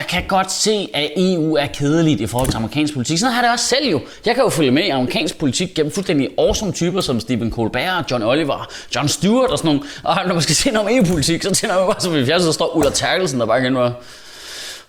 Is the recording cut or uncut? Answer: uncut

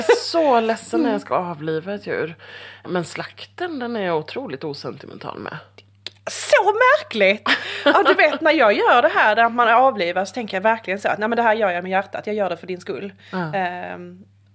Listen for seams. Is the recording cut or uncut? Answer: uncut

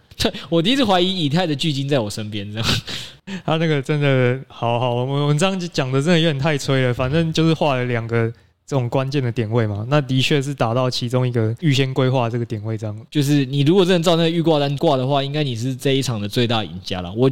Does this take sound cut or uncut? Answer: uncut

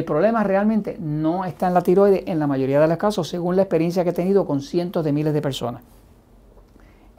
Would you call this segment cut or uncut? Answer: uncut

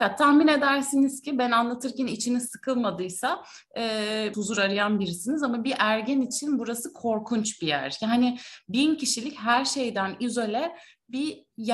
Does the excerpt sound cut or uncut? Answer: cut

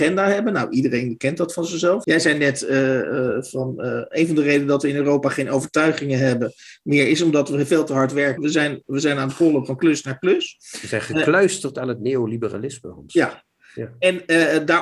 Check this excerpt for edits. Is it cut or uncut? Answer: cut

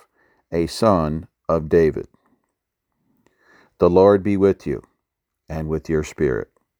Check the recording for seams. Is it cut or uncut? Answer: uncut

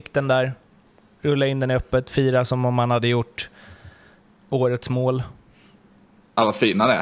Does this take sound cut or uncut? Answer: uncut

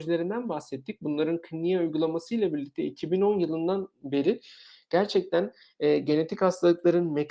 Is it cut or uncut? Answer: uncut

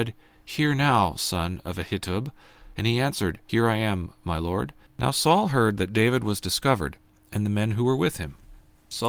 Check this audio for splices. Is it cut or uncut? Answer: cut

